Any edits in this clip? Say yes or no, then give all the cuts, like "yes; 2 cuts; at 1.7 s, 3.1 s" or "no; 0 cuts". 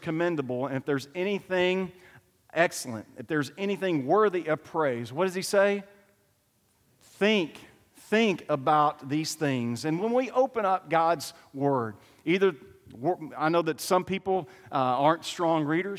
no; 0 cuts